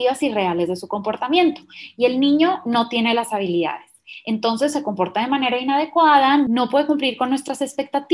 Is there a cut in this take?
no; 0 cuts

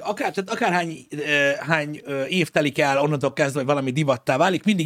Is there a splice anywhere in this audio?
no; 0 cuts

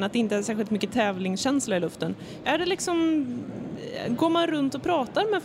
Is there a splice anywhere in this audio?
yes; 1 cut; at 2.4 s

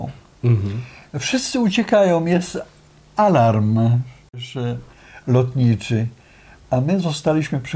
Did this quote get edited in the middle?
no; 0 cuts

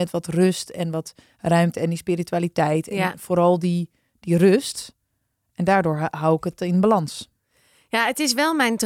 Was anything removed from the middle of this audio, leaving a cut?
no; 0 cuts

